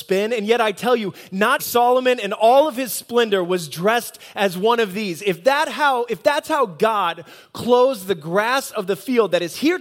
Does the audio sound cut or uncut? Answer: cut